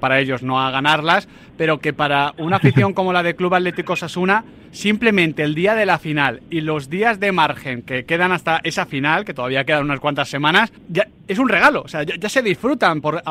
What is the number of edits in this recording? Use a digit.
1